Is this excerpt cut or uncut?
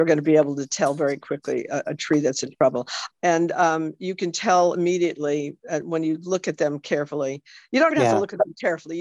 cut